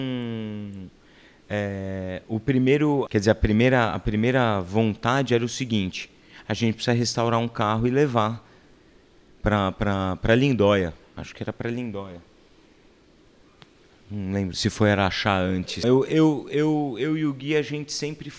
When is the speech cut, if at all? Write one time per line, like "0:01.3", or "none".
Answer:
0:03.1
0:14.5
0:15.8